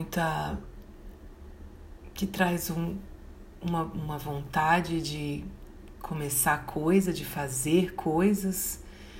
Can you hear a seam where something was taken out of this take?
no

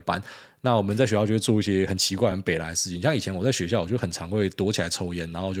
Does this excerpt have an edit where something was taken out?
no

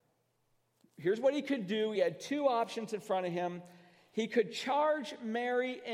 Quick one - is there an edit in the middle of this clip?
no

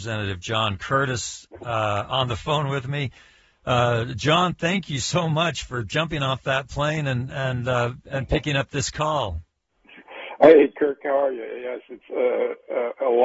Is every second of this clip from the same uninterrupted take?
yes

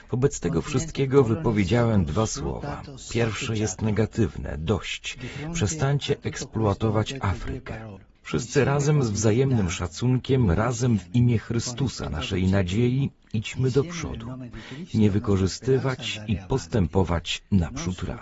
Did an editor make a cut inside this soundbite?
yes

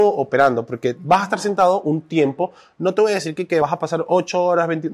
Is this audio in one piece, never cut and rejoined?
yes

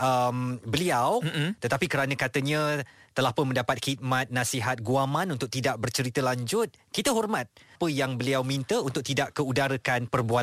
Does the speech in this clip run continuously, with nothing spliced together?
no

